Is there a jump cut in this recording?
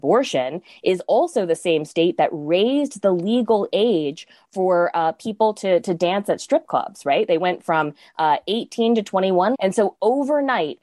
yes; 1 cut; at 9.5 s

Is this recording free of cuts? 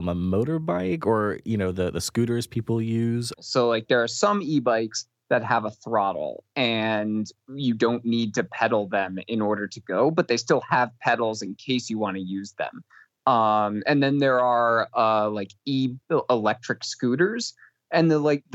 no; 1 cut; at 3.3 s

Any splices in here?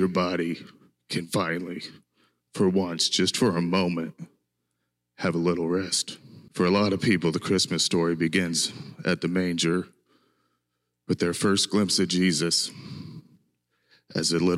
yes; 1 cut; at 6.5 s

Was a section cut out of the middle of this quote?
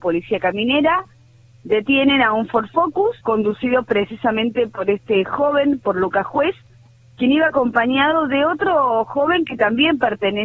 yes; 1 cut; at 3.2 s

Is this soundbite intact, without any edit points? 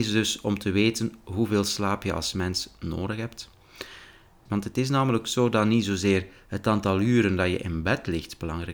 no; 1 cut; at 4.5 s

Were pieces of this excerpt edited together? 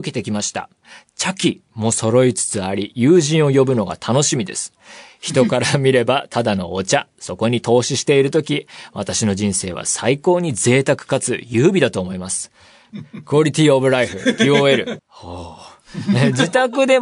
yes; 2 cuts; at 12.9 s, 15.0 s

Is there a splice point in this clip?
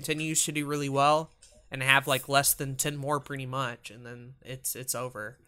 no; 0 cuts

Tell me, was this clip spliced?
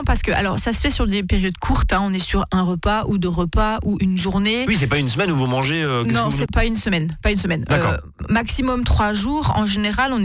yes; 1 cut; at 6.5 s

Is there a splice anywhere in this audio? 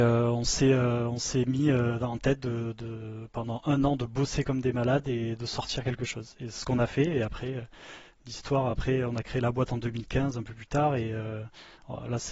no; 0 cuts

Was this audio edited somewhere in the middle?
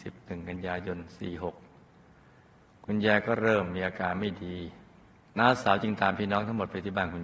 no; 0 cuts

